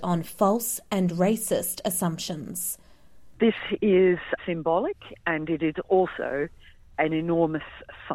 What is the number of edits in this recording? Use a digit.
2